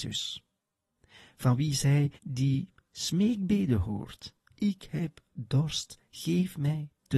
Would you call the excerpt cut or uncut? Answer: cut